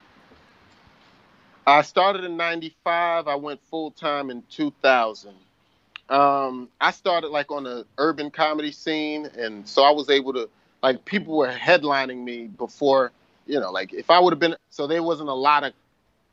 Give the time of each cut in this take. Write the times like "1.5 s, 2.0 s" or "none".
14.6 s